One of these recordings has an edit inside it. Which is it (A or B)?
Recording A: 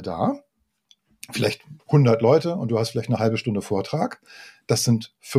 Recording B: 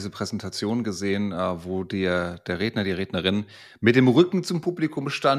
A